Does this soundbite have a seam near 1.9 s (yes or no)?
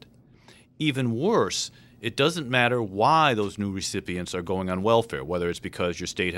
no